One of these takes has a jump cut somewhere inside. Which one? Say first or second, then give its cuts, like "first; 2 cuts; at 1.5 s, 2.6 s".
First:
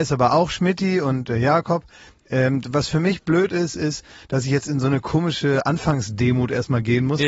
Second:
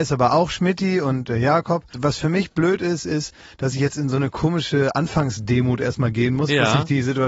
second; 1 cut; at 1.9 s